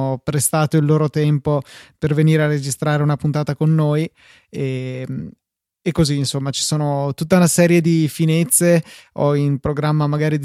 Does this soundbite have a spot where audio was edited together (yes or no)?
no